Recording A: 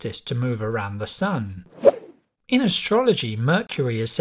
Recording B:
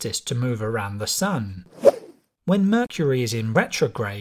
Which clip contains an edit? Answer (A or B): B